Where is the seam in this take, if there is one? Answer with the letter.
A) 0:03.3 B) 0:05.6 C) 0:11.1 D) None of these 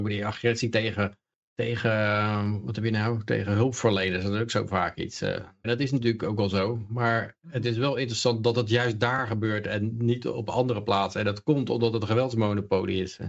B